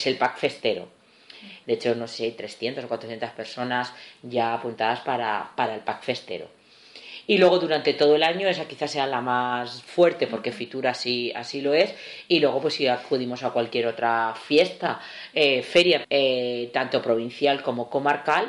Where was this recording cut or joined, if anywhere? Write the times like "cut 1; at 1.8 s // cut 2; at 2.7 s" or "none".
cut 1; at 1.6 s // cut 2; at 16.0 s

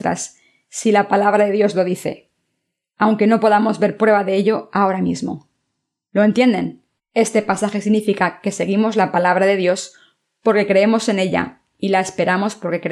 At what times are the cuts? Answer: cut 1; at 7.0 s

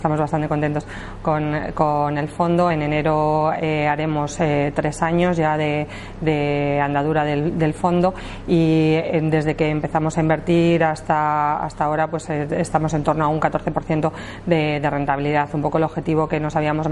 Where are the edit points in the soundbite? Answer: none

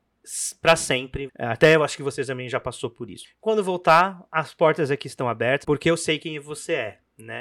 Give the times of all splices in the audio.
cut 1; at 1.3 s // cut 2; at 3.2 s // cut 3; at 5.6 s

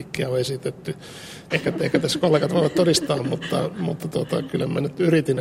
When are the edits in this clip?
cut 1; at 1.5 s

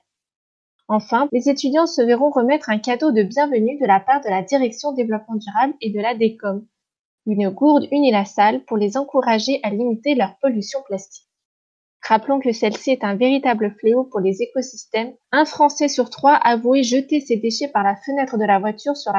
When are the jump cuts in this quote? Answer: cut 1; at 1.3 s // cut 2; at 15.2 s

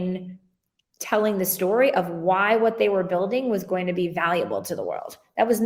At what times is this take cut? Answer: none

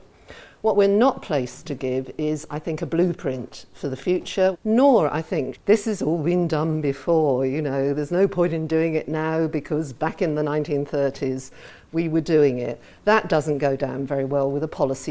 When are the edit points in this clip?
cut 1; at 4.5 s // cut 2; at 5.5 s

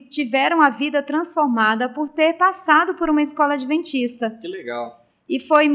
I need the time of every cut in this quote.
none

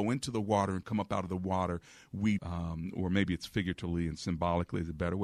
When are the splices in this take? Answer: cut 1; at 2.4 s

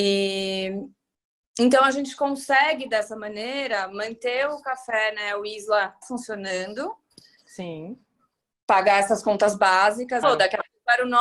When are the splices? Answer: cut 1; at 6.0 s // cut 2; at 10.2 s

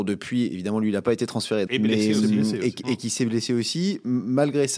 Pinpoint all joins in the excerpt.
cut 1; at 1.7 s

